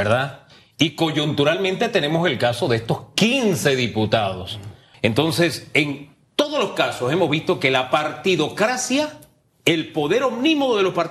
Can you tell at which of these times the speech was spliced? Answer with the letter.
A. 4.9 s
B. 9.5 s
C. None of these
A